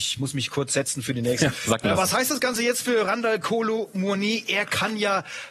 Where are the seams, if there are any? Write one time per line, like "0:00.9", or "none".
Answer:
0:01.5